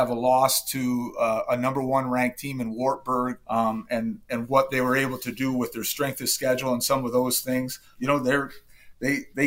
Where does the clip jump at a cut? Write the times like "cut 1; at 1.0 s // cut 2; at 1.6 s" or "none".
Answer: cut 1; at 3.4 s // cut 2; at 7.9 s